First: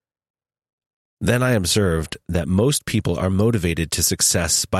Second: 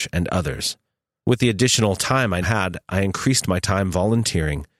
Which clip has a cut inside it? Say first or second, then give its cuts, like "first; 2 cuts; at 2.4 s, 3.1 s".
second; 2 cuts; at 1.2 s, 2.4 s